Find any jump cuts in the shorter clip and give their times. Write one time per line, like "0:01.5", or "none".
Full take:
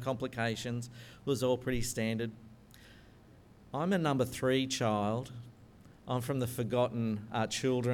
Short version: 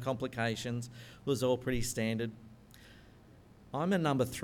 none